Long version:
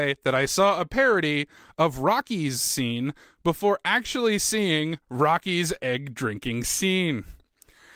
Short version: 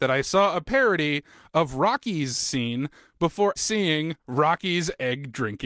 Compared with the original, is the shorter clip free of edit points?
no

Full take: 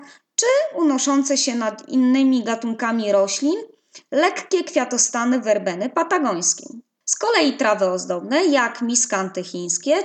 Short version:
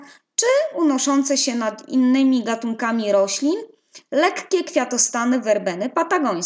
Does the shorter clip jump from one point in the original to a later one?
no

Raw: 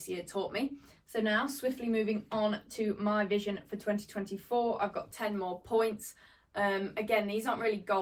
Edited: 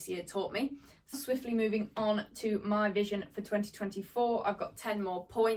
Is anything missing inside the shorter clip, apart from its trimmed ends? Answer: yes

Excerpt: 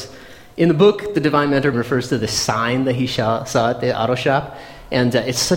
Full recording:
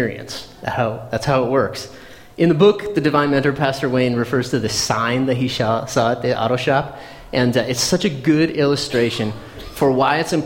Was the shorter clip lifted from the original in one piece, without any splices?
no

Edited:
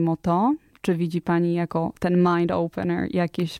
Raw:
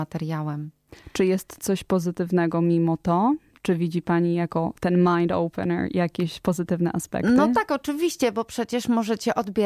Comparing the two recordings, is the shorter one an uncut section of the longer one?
yes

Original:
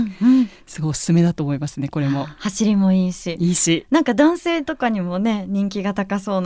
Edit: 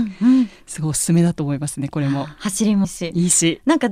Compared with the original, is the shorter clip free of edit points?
no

